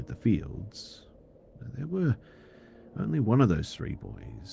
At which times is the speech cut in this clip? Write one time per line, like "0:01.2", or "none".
none